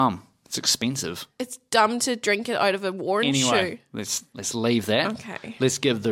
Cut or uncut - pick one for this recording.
uncut